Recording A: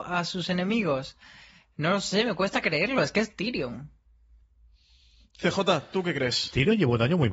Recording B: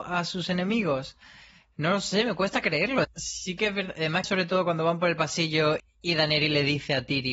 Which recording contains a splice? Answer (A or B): B